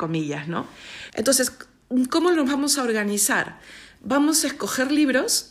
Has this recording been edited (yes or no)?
yes